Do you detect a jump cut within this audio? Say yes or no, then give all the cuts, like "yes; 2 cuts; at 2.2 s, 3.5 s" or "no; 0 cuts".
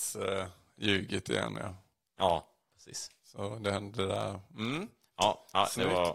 no; 0 cuts